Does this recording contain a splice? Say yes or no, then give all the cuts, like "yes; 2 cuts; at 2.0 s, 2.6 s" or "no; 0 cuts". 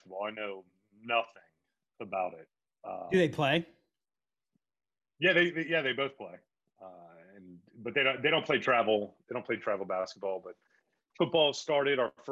no; 0 cuts